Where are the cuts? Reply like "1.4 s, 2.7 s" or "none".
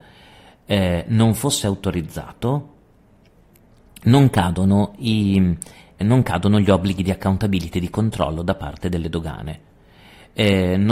6.0 s